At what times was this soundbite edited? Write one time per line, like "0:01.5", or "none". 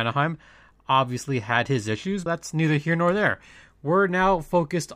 0:02.3